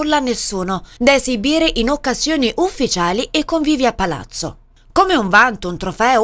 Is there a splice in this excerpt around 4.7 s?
no; 1 cut; at 1.0 s

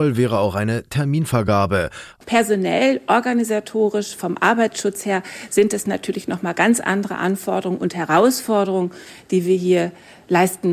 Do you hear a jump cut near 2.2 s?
yes; 1 cut; at 2.2 s

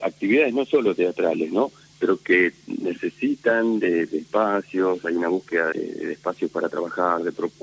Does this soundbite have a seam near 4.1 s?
no; 1 cut; at 5.7 s

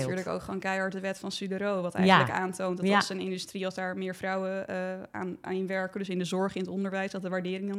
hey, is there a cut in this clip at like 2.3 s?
no; 1 cut; at 5.4 s

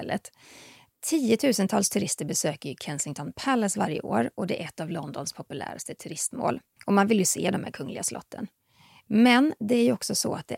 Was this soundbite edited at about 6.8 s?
yes; 1 cut; at 6.8 s

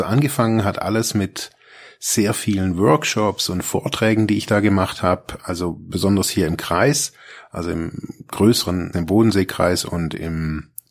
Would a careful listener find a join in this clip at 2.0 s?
no; 1 cut; at 8.9 s

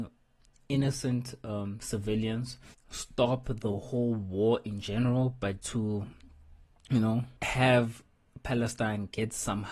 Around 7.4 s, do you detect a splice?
yes; 2 cuts; at 5.6 s, 7.4 s

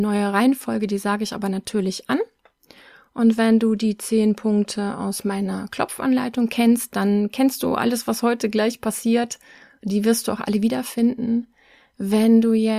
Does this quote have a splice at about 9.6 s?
no; 0 cuts

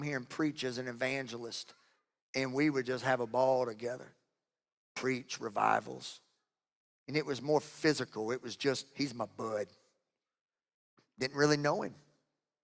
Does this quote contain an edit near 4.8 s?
yes; 1 cut; at 4.8 s

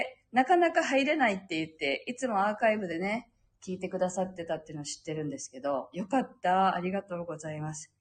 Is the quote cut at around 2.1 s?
no; 1 cut; at 5.9 s

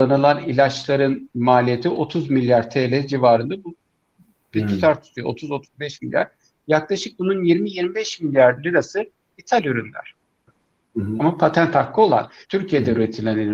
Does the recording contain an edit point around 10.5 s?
yes; 2 cuts; at 10.5 s, 12.4 s

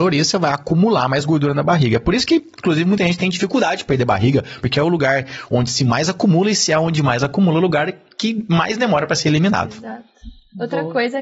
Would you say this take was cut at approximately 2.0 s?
no; 1 cut; at 4.6 s

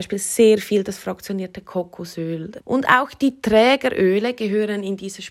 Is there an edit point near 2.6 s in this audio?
yes; 1 cut; at 2.6 s

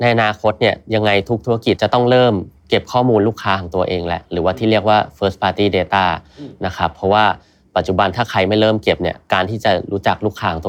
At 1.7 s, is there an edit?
yes; 1 cut; at 1.7 s

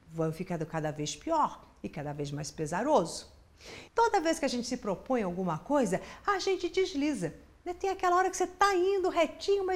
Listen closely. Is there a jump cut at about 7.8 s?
no; 1 cut; at 3.9 s

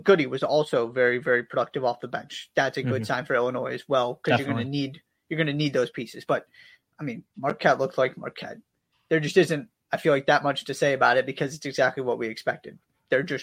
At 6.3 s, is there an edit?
no; 0 cuts

